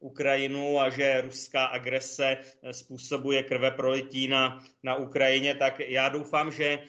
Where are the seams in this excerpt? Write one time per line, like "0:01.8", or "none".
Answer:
none